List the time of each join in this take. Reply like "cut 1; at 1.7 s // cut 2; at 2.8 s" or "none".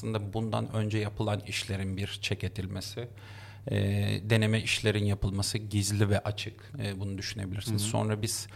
none